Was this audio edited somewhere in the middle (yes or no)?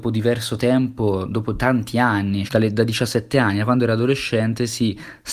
yes